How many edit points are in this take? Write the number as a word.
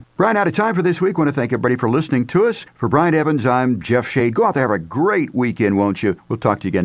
zero